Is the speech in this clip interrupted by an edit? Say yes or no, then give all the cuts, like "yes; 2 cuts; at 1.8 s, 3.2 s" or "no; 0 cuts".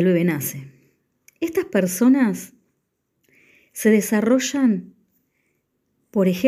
no; 0 cuts